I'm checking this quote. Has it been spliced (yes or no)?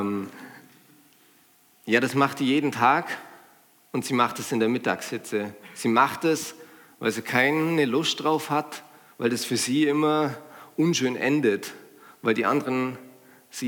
yes